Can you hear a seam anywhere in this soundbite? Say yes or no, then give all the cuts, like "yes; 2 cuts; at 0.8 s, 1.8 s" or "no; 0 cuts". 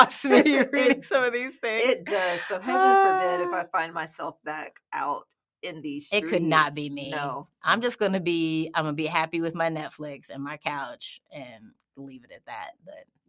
no; 0 cuts